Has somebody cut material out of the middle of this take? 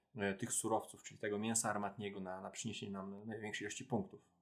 no; 0 cuts

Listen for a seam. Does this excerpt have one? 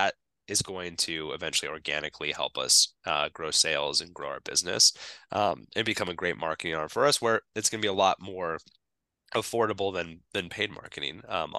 no; 0 cuts

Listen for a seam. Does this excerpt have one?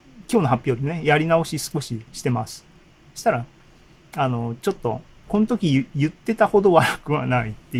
no; 0 cuts

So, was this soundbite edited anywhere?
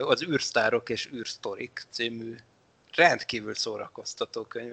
no; 0 cuts

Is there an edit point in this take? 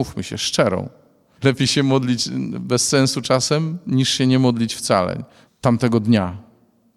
yes; 2 cuts; at 1.3 s, 5.5 s

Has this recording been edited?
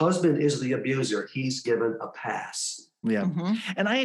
yes; 1 cut; at 3.0 s

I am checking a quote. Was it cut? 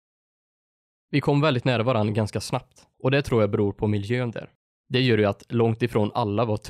yes; 2 cuts; at 2.9 s, 4.8 s

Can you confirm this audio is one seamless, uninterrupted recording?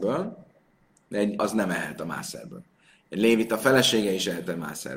no; 1 cut; at 1.4 s

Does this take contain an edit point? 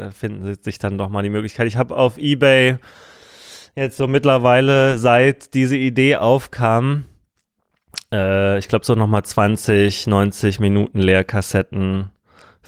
no; 0 cuts

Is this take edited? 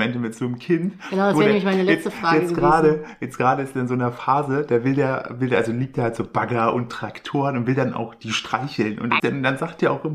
yes; 1 cut; at 9.2 s

